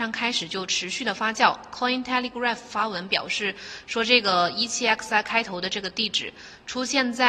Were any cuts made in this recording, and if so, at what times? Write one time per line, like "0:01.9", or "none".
none

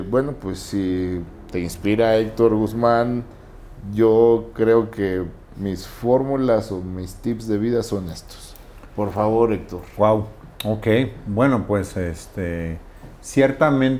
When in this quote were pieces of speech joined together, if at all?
none

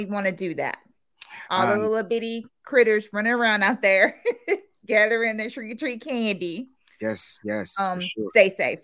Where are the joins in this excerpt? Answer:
none

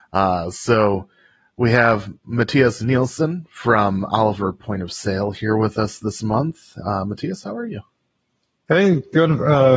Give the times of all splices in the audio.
none

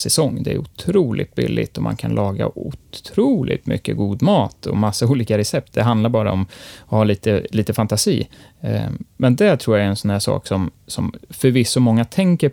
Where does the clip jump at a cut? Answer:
none

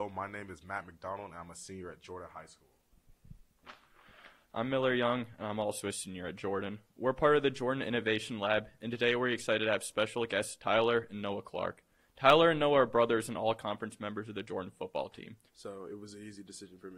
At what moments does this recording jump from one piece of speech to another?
0:15.5

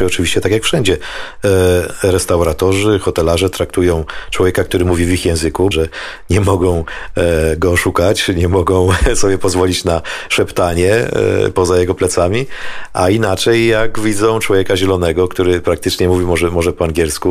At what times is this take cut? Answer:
0:05.7

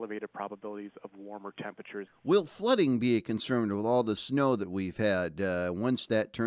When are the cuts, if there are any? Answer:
0:02.1

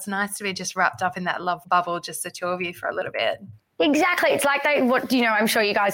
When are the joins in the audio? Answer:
none

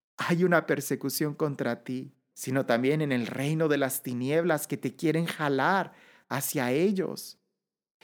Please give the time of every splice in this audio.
0:02.3

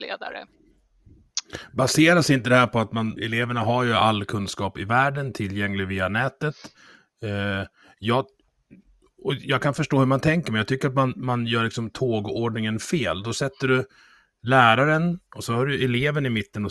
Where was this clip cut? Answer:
0:03.2

